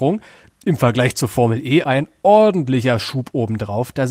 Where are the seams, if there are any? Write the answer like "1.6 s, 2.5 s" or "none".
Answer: 1.8 s